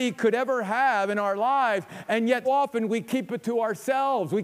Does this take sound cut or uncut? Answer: cut